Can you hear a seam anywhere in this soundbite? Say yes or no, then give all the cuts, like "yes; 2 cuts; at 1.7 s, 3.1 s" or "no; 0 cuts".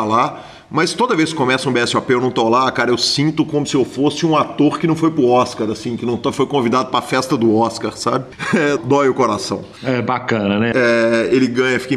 yes; 2 cuts; at 8.8 s, 10.7 s